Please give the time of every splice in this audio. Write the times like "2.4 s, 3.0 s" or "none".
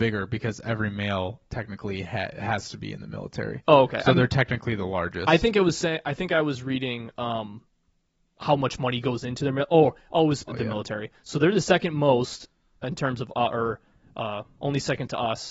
10.5 s